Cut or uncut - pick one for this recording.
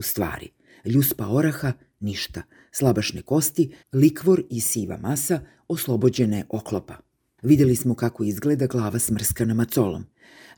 cut